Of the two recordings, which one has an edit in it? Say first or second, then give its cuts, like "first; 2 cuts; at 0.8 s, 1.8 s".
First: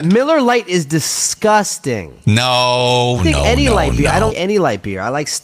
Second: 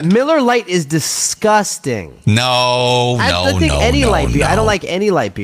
first; 2 cuts; at 3.2 s, 4.3 s